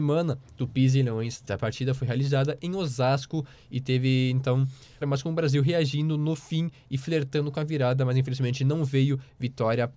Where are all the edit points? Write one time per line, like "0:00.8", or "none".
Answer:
0:01.5
0:05.0